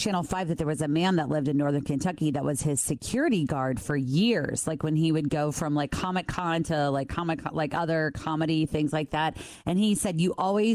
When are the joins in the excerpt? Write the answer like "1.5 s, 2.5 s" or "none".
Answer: none